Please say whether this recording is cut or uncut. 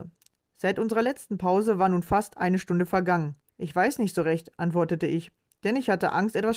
cut